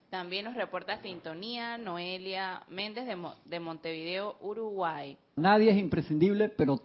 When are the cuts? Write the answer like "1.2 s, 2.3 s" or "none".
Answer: 5.4 s